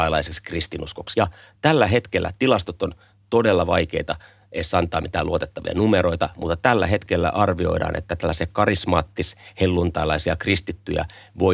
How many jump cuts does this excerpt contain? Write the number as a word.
one